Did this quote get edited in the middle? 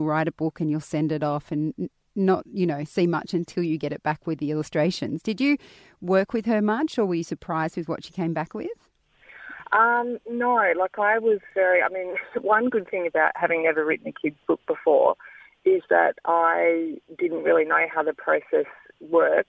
no; 0 cuts

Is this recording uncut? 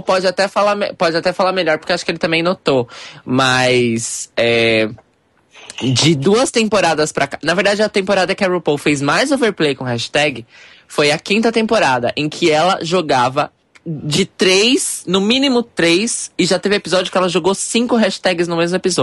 yes; 0 cuts

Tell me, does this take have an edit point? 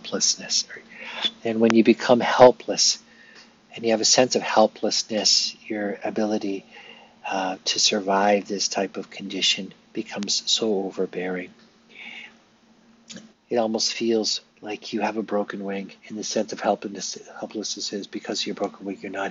yes; 3 cuts; at 13.3 s, 14.5 s, 16.0 s

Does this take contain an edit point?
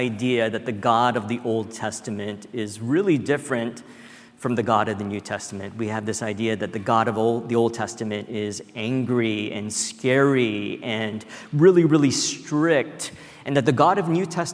no; 0 cuts

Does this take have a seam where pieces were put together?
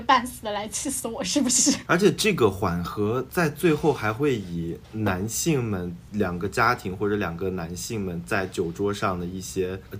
no; 0 cuts

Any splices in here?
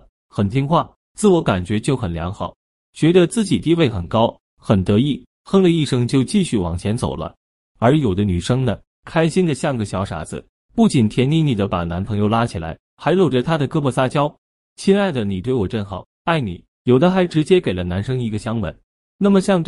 no; 0 cuts

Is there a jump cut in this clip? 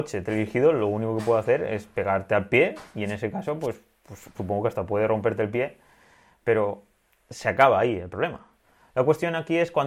yes; 1 cut; at 4.3 s

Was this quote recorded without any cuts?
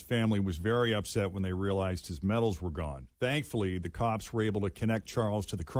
no; 1 cut; at 3.1 s

